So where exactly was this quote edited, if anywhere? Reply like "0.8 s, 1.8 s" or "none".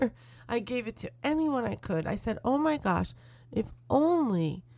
none